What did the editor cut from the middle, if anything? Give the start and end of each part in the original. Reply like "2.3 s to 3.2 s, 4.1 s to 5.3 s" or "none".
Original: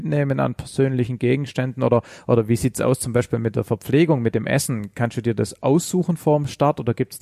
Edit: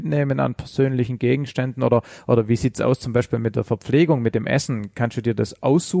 none

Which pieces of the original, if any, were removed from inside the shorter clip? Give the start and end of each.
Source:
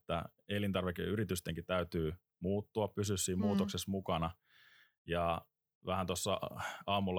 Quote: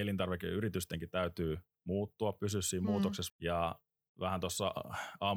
3.9 s to 5.0 s

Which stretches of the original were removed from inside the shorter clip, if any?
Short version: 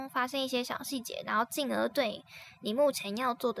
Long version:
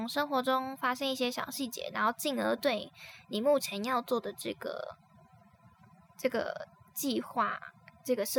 none

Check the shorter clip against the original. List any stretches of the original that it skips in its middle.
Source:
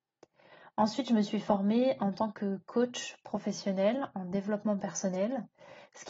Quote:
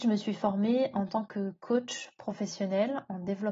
none

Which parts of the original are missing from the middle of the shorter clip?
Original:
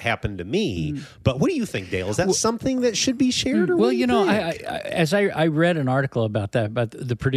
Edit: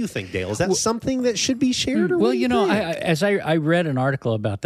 4.5 s to 4.8 s

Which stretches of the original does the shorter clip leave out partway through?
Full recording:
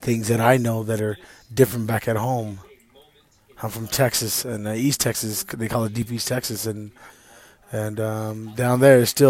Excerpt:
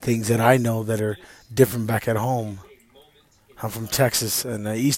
none

